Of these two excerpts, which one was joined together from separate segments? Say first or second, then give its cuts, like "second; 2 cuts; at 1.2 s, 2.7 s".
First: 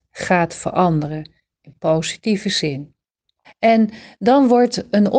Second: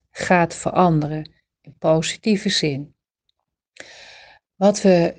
first; 1 cut; at 3.4 s